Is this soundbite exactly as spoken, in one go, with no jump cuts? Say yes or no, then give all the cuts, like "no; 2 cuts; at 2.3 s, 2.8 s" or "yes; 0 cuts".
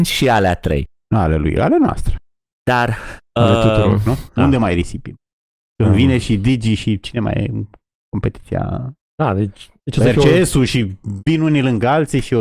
no; 1 cut; at 4.4 s